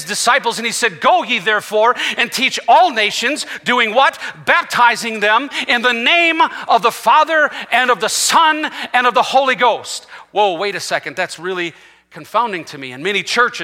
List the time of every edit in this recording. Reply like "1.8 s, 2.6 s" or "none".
none